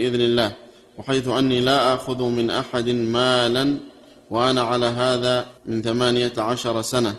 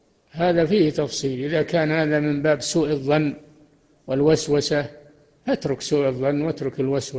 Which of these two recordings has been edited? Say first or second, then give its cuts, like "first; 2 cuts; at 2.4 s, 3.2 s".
first; 1 cut; at 5.6 s